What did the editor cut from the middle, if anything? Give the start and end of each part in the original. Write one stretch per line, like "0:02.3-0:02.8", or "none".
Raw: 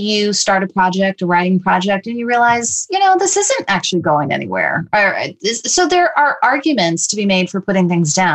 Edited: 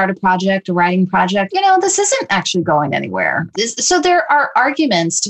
0:02.0-0:02.9
0:04.9-0:05.4